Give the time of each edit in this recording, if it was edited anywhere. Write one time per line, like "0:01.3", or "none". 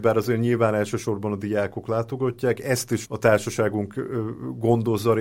0:03.0